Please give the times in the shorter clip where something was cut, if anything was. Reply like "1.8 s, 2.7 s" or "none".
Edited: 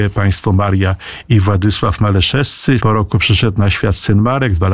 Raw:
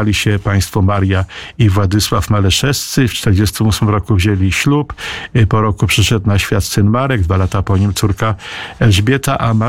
2.8 s